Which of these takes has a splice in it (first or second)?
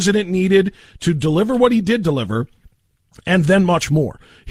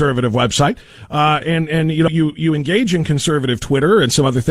second